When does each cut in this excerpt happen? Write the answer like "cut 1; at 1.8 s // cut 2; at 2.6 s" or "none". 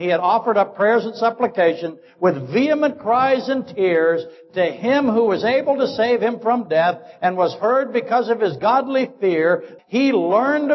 cut 1; at 9.8 s

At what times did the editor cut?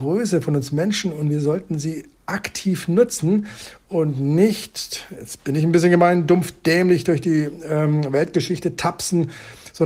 none

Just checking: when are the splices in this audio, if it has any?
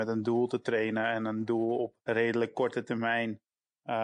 cut 1; at 2.0 s

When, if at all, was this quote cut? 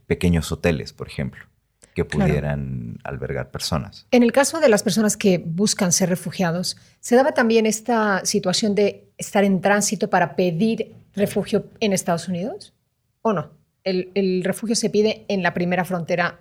none

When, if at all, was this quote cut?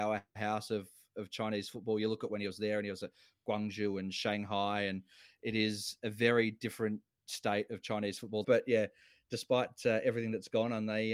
cut 1; at 8.4 s

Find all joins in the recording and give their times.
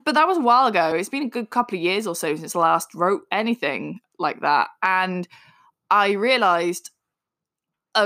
none

